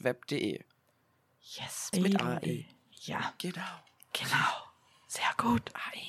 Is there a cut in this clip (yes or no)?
yes